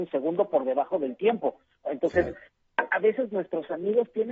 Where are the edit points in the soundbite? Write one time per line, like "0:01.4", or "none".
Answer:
0:01.8